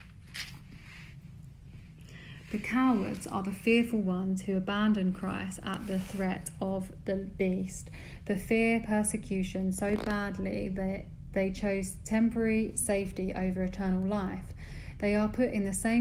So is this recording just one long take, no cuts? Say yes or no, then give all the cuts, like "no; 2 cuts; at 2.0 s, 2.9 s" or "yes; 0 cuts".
yes; 0 cuts